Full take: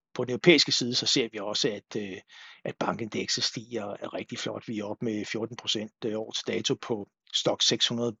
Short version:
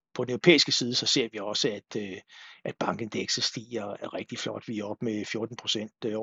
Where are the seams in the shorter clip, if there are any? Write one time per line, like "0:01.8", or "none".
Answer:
none